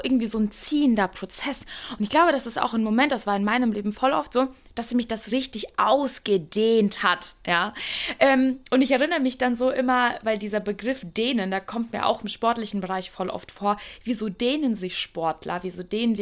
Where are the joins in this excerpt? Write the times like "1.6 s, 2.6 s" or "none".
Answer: 5.3 s

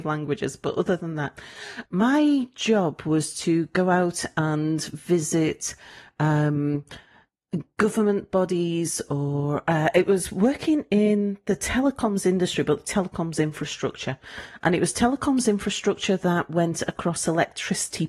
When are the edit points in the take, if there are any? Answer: 1.9 s

